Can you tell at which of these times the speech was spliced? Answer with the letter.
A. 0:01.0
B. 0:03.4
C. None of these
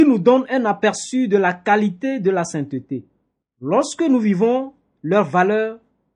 B